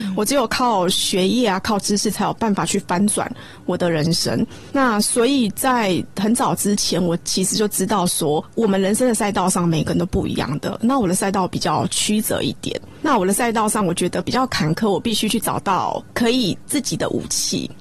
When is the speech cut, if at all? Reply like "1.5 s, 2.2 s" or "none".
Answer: none